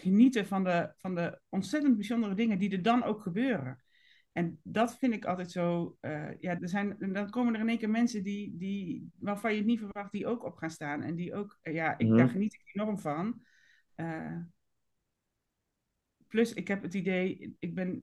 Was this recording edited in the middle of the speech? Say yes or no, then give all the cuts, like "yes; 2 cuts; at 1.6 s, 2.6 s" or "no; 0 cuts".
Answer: yes; 1 cut; at 6.6 s